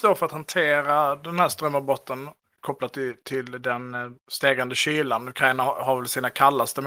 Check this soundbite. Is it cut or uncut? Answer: cut